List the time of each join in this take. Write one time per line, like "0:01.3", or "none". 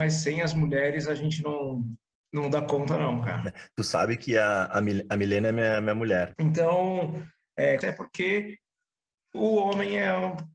0:06.4
0:07.8